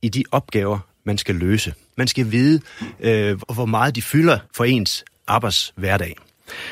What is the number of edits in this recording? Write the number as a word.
three